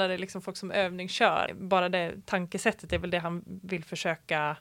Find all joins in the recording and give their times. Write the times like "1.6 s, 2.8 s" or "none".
1.5 s